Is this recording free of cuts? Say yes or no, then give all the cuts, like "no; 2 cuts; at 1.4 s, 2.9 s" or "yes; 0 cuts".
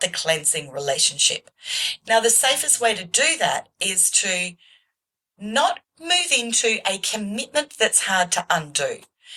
yes; 0 cuts